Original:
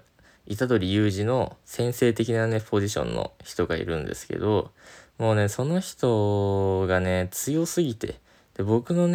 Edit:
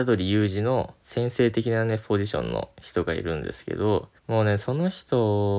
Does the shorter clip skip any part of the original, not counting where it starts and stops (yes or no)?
yes